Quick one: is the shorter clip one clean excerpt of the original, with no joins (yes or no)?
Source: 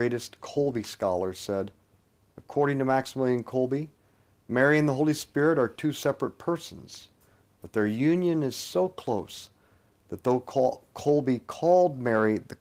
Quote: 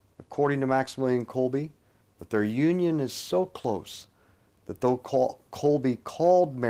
no